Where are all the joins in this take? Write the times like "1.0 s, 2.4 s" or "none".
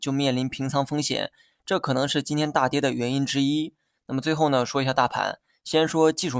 none